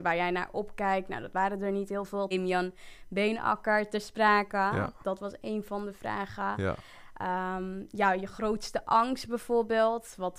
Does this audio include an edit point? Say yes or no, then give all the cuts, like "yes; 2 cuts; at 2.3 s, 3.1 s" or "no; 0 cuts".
yes; 1 cut; at 2.3 s